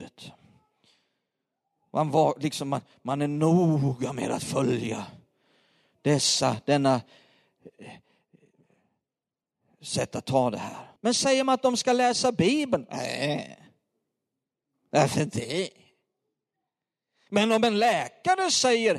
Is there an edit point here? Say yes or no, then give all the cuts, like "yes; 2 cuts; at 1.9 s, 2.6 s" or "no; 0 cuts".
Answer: yes; 1 cut; at 11.0 s